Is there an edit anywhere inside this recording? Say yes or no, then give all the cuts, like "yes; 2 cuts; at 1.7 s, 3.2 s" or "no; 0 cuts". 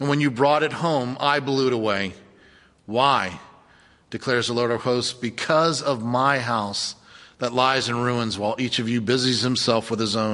no; 0 cuts